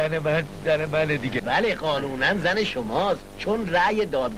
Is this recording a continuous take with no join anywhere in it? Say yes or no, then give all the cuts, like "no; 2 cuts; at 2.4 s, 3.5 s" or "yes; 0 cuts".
no; 1 cut; at 1.4 s